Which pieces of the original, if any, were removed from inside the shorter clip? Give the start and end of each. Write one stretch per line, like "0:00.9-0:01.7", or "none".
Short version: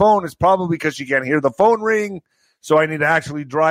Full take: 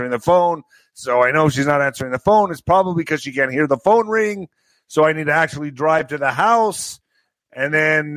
none